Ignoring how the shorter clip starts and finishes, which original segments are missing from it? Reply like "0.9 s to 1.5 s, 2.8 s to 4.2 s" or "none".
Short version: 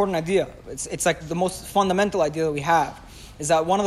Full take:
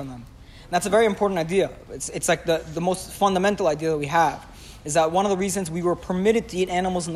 2.4 s to 2.7 s